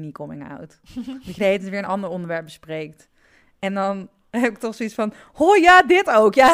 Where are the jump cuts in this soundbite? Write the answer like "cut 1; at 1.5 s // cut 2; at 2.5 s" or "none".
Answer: none